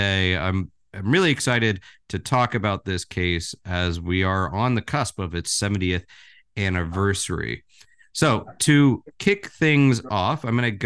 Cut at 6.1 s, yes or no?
no